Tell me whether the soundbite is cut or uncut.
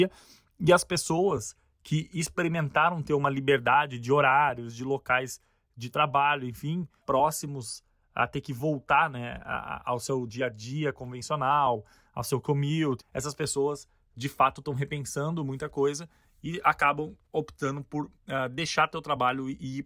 cut